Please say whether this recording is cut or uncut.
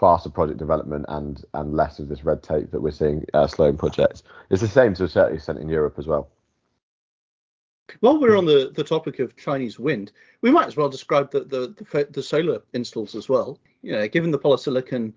uncut